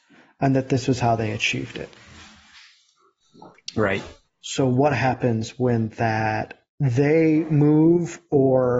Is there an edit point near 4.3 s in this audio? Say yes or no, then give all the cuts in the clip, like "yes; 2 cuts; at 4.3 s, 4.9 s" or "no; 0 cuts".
yes; 1 cut; at 4.3 s